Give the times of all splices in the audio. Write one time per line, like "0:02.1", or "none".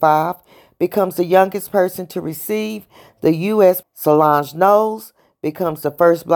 0:03.8